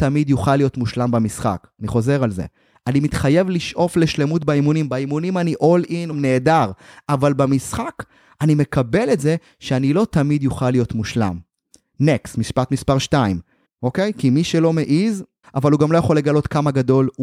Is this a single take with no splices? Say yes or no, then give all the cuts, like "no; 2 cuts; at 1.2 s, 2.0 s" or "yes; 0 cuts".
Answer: no; 3 cuts; at 6.1 s, 13.6 s, 15.4 s